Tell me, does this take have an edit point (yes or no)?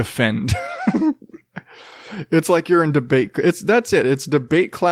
no